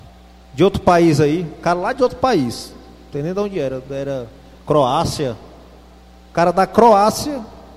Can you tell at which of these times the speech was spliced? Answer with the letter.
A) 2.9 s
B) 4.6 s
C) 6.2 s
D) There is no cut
D